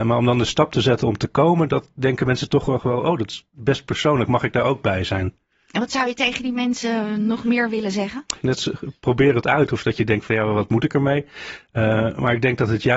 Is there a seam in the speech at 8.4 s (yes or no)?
yes